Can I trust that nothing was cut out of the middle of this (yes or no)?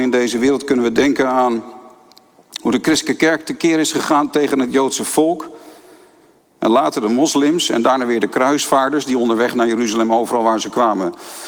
yes